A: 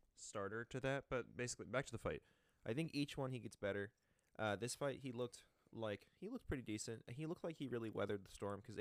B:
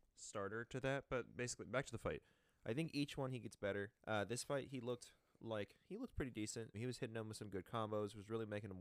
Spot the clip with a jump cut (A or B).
B